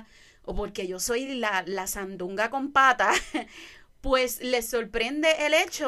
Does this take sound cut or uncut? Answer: uncut